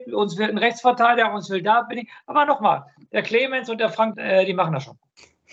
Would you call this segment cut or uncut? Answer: cut